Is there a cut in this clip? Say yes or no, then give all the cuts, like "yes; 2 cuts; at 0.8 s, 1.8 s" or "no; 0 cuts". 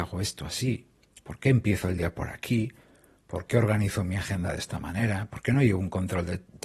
no; 0 cuts